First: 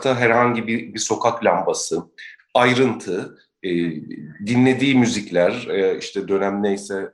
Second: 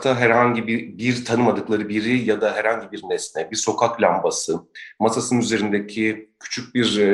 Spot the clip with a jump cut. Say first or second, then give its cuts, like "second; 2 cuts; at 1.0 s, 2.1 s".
first; 2 cuts; at 0.9 s, 2.4 s